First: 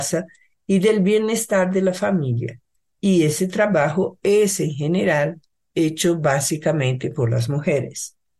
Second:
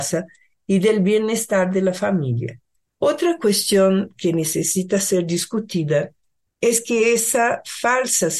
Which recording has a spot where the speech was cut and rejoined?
second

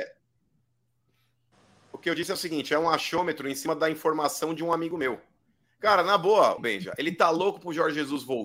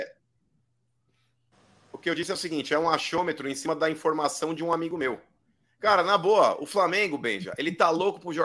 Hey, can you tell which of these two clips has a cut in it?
first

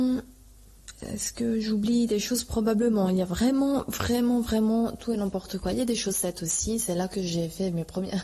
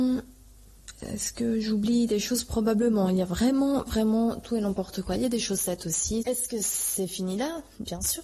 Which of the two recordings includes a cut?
second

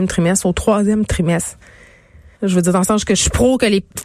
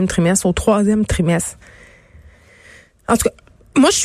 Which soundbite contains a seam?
first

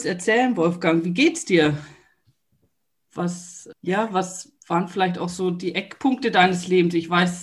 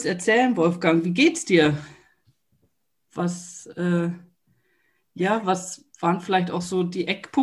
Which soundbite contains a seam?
first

